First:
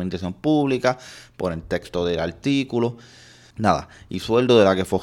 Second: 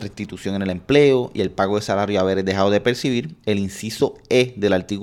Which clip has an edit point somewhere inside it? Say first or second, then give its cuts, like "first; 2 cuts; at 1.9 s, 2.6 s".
first; 1 cut; at 3.5 s